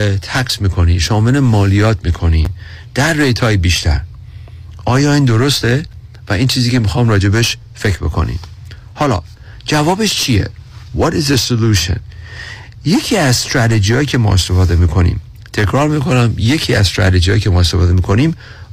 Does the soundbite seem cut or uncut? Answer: uncut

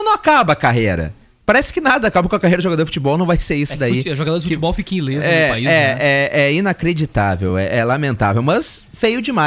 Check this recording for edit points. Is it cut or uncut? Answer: uncut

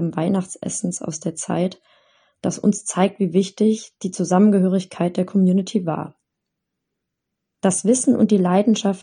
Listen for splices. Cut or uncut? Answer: uncut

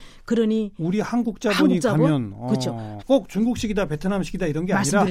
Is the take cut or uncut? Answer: cut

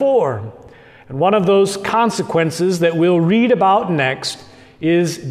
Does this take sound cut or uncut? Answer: uncut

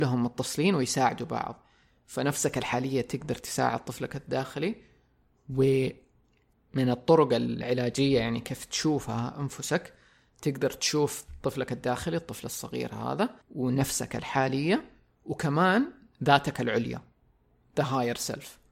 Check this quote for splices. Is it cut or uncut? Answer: cut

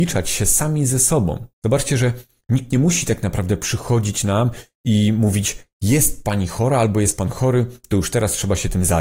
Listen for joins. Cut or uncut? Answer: cut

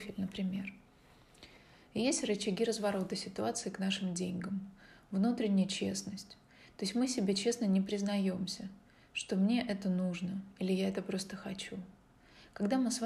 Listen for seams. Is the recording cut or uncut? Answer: uncut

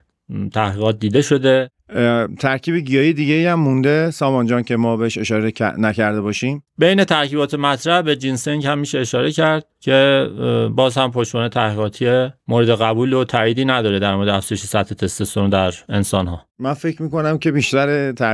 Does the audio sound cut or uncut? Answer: cut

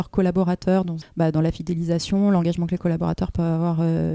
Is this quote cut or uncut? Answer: cut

